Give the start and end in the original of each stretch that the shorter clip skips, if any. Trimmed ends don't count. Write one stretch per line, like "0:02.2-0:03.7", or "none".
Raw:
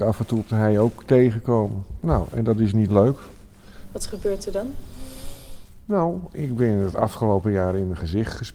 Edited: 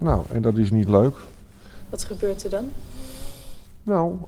none

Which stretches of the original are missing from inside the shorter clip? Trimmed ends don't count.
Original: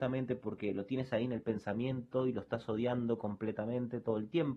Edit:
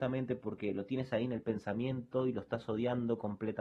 none

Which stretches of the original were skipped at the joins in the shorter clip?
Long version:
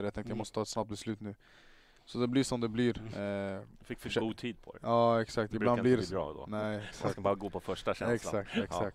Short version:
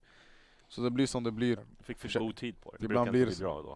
0:02.9-0:03.6
0:04.8-0:05.5

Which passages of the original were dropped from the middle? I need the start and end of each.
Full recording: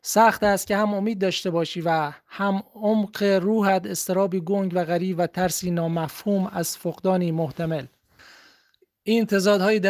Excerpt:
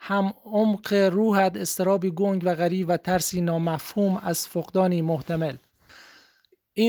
none

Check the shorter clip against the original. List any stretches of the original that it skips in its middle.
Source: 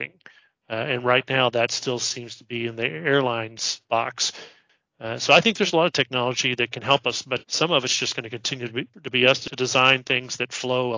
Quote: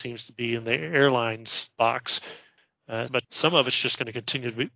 0:05.2-0:07.2

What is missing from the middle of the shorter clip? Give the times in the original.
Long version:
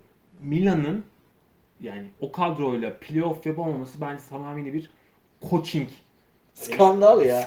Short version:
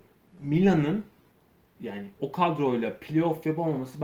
none

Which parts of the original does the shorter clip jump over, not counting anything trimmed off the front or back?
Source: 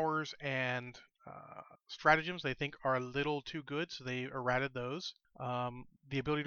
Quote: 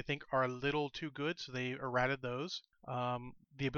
none

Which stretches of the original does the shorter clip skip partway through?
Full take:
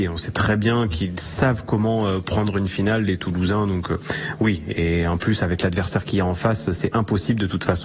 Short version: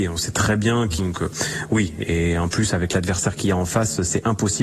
0:01.0-0:03.7

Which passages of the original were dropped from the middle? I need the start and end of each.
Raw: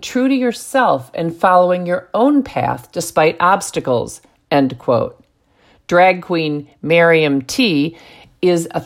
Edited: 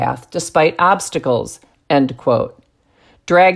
none

